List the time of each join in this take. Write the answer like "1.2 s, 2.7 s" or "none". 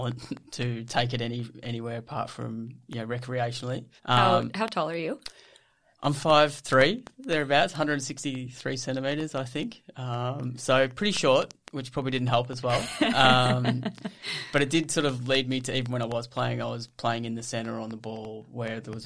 4.0 s